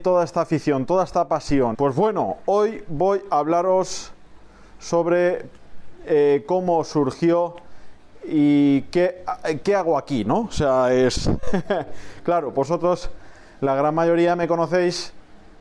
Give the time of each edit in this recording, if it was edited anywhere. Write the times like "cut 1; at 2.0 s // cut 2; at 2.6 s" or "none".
cut 1; at 1.7 s